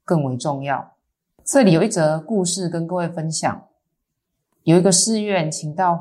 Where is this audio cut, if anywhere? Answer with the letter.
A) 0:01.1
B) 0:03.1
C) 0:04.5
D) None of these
D